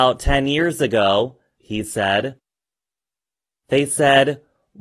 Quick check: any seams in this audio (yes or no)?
yes